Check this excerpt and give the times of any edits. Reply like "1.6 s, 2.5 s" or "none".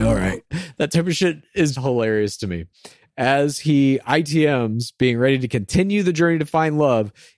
1.7 s